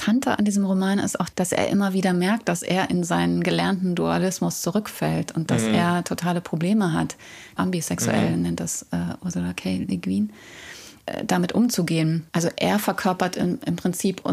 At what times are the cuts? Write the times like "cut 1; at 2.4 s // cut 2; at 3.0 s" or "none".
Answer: cut 1; at 7.6 s // cut 2; at 12.3 s